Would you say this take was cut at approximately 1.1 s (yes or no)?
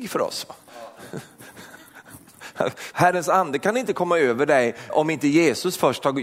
no